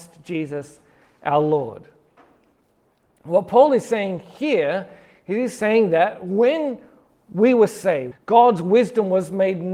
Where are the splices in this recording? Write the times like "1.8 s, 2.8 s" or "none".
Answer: 8.1 s